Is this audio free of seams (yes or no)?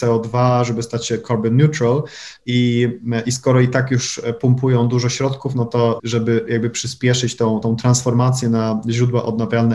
no